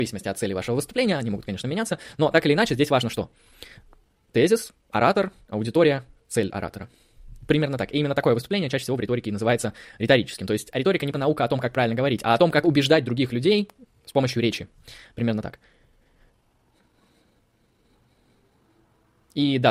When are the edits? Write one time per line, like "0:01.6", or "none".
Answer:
0:11.1